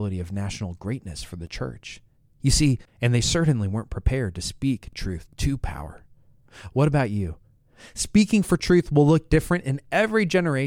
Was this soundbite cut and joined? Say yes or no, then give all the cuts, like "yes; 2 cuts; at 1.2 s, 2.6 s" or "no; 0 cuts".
yes; 1 cut; at 2.8 s